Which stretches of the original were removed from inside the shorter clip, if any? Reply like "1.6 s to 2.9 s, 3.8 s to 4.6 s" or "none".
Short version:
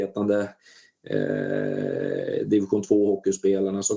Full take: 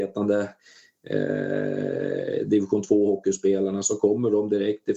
none